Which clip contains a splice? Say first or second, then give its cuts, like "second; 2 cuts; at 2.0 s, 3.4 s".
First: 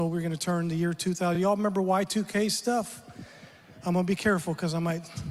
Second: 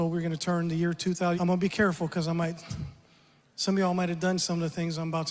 second; 1 cut; at 1.3 s